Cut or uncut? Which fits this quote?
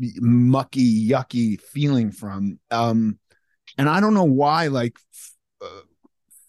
uncut